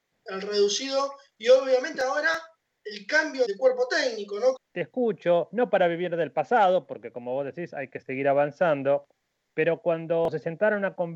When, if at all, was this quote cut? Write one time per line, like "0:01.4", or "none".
0:03.4
0:04.6